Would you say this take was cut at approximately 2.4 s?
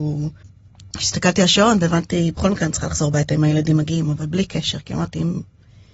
no; 0 cuts

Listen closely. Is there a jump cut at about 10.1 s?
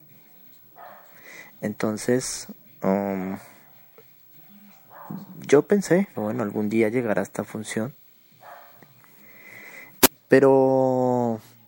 yes; 2 cuts; at 6.1 s, 10.1 s

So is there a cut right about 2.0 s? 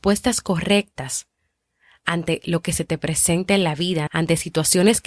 no; 1 cut; at 4.1 s

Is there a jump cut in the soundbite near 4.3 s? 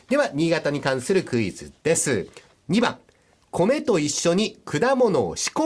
no; 1 cut; at 2.5 s

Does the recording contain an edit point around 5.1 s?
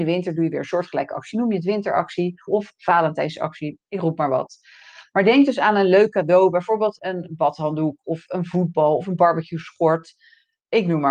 no; 3 cuts; at 2.5 s, 7.0 s, 8.0 s

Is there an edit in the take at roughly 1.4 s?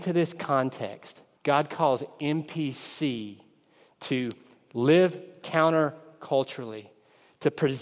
yes; 1 cut; at 1.4 s

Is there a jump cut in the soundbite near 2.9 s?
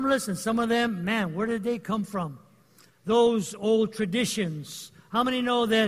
yes; 1 cut; at 2.9 s

